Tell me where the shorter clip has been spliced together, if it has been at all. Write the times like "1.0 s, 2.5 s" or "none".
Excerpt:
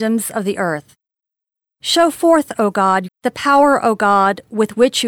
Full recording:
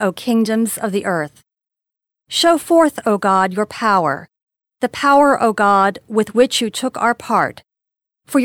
3.1 s